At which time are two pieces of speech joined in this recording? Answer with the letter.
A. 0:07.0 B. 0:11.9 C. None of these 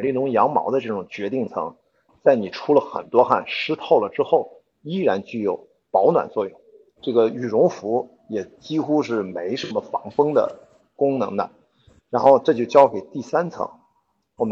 A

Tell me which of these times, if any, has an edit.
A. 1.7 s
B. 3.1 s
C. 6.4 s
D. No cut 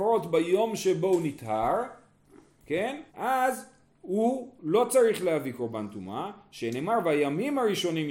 B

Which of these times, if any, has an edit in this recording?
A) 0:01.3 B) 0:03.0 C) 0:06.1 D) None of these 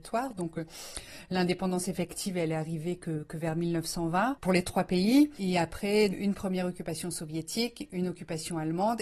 C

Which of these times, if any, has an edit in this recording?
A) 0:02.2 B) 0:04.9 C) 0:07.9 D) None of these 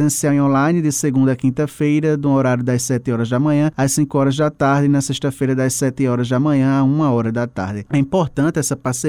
C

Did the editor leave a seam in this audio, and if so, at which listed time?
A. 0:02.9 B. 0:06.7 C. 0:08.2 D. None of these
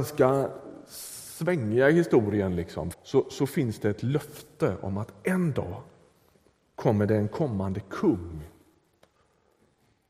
A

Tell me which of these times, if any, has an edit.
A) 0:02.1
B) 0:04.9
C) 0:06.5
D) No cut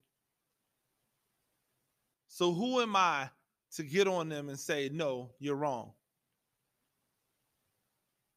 A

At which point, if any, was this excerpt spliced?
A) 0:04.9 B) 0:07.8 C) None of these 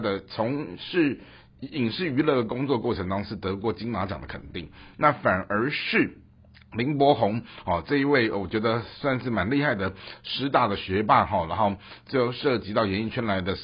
A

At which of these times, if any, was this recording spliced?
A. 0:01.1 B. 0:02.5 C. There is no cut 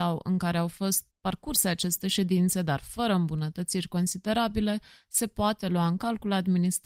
A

